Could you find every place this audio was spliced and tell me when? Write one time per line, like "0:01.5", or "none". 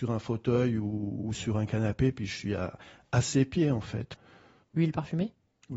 0:04.6